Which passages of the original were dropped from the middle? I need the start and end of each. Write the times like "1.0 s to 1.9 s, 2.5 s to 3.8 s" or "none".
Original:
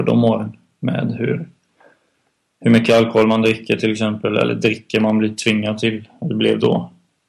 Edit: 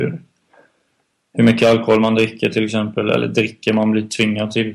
none